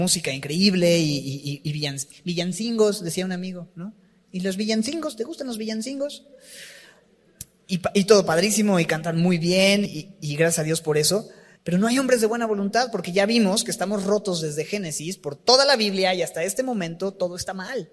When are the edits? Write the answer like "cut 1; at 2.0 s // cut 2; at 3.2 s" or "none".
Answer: cut 1; at 9.9 s // cut 2; at 11.6 s